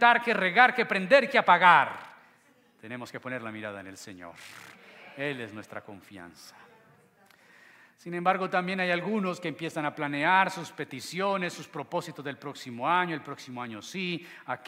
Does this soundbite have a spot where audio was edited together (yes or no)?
no